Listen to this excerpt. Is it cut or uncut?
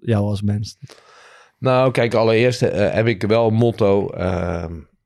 uncut